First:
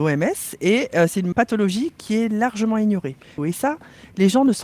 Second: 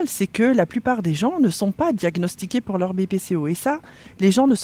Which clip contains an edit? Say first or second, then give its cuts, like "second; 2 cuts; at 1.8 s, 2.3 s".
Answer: first; 1 cut; at 3.4 s